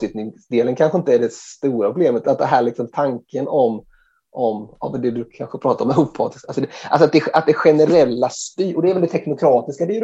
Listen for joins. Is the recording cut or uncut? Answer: cut